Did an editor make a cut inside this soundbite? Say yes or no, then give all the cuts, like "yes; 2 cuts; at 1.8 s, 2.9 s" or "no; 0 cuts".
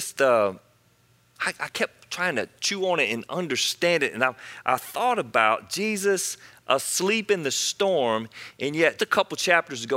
yes; 1 cut; at 9.0 s